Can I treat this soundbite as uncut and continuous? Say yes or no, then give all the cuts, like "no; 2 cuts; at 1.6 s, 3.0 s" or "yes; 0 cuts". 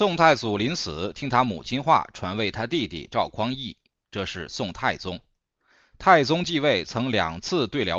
yes; 0 cuts